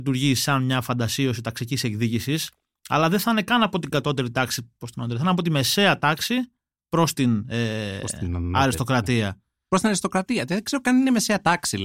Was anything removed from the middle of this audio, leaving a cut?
no; 0 cuts

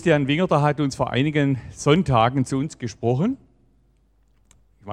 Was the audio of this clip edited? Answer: no; 0 cuts

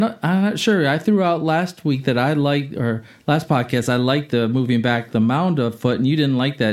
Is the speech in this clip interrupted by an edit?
no; 0 cuts

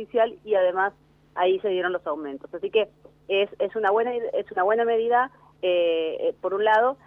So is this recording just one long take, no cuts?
yes; 0 cuts

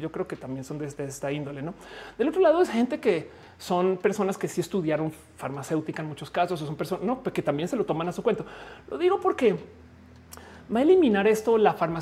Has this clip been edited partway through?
no; 0 cuts

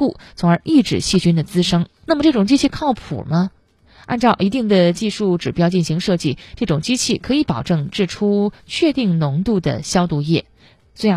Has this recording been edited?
yes; 1 cut; at 2.1 s

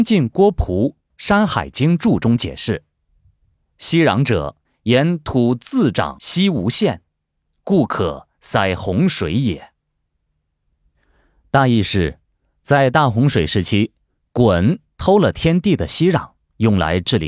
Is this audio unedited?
yes; 0 cuts

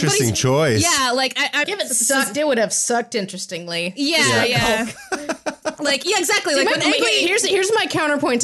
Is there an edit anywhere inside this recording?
yes; 1 cut; at 1.6 s

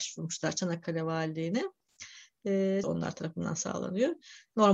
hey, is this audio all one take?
no; 1 cut; at 2.8 s

